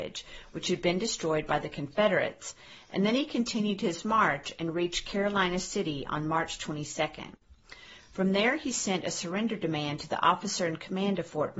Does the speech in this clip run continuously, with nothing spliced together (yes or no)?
yes